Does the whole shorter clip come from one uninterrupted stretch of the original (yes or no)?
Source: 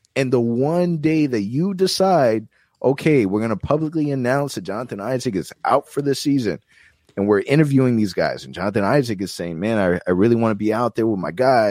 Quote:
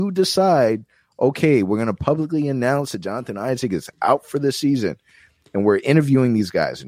yes